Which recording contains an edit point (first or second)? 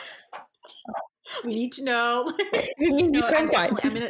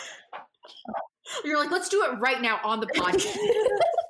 first